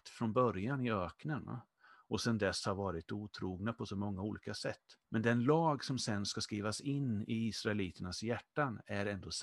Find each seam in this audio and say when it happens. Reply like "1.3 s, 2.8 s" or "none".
5.0 s